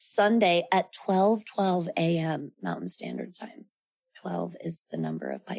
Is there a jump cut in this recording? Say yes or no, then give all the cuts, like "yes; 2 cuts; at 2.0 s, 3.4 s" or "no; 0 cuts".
no; 0 cuts